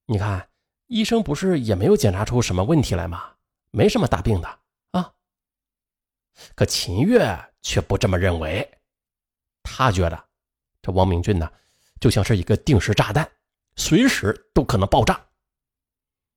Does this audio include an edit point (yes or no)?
no